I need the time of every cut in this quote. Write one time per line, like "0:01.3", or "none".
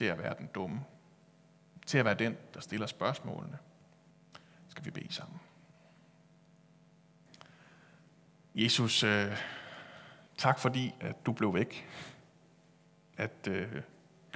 0:04.1